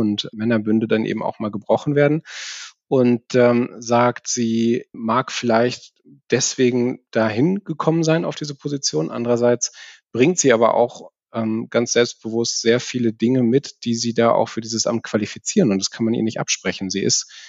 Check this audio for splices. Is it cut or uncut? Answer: uncut